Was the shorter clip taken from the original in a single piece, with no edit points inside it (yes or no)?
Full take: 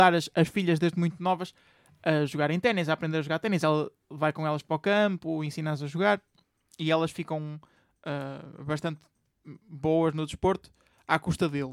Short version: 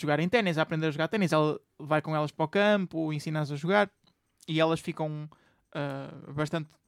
yes